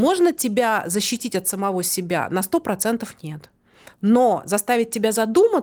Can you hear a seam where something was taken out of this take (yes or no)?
no